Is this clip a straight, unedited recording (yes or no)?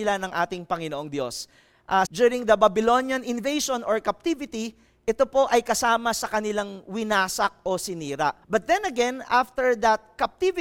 no